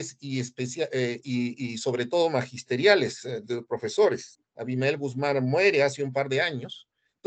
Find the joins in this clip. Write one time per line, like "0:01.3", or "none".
0:04.4